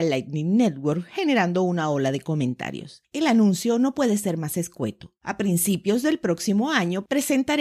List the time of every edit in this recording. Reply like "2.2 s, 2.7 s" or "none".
5.2 s